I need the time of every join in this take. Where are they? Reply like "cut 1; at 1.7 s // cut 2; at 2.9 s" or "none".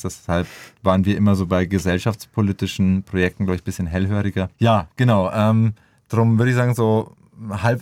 cut 1; at 4.5 s